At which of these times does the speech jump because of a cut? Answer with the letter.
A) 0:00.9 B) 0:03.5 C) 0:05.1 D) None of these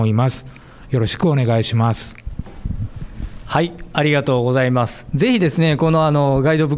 D